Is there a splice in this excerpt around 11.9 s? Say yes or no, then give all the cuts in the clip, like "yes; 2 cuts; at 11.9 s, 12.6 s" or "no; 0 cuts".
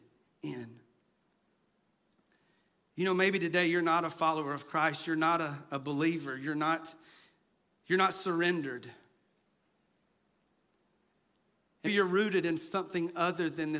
yes; 1 cut; at 11.9 s